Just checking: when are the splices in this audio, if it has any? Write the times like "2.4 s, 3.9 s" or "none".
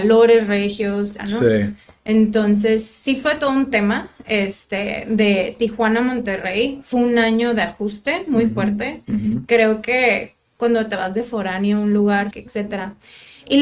1.2 s, 12.3 s